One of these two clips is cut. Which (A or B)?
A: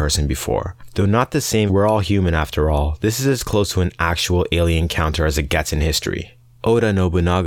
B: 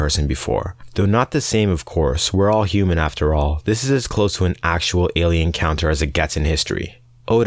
A